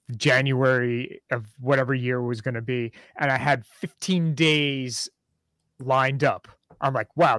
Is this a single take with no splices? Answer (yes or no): yes